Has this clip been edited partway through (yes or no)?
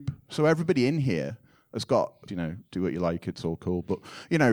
yes